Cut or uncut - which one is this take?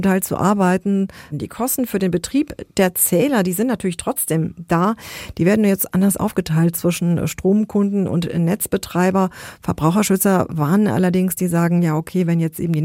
cut